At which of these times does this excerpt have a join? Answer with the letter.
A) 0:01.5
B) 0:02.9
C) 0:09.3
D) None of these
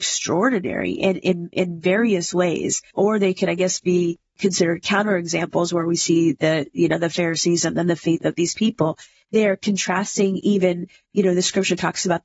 B